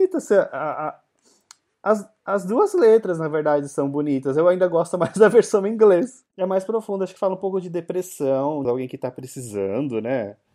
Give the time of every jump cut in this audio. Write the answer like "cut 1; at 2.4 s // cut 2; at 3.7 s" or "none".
cut 1; at 6.3 s // cut 2; at 8.6 s